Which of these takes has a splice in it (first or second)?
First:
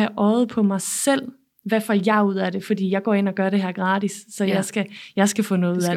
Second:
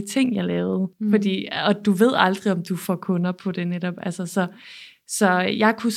second